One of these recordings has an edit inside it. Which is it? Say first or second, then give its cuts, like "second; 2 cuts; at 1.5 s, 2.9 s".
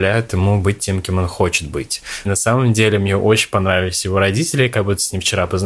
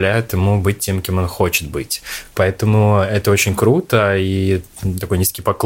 first; 1 cut; at 2.3 s